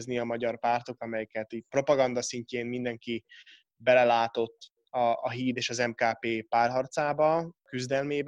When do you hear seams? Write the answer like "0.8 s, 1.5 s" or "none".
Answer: 1.0 s